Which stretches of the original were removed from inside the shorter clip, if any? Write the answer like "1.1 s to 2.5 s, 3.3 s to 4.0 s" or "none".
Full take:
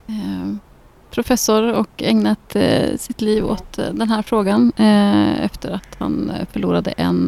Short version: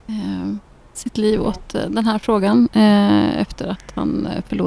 0.9 s to 3.0 s

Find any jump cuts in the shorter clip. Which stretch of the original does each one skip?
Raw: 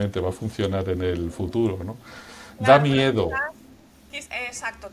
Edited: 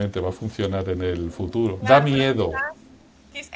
1.8 s to 2.6 s

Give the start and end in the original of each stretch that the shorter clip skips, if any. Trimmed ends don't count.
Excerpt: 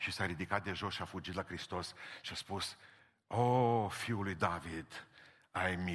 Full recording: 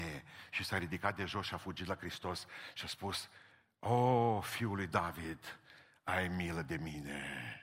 none

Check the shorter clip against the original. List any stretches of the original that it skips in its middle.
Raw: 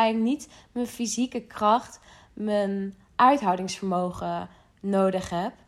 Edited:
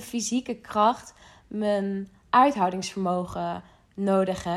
none

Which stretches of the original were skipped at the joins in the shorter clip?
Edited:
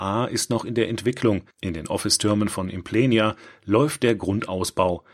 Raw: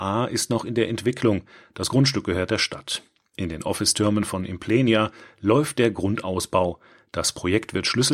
1.5 s to 3.2 s

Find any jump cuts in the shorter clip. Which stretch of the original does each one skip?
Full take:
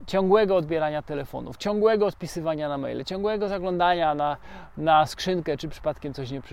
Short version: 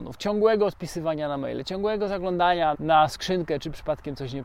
4.1 s to 4.7 s

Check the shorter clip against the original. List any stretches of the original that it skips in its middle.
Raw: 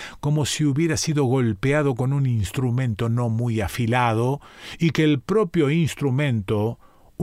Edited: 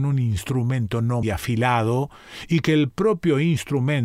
3.3 s to 3.5 s

